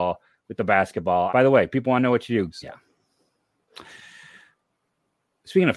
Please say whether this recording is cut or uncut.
cut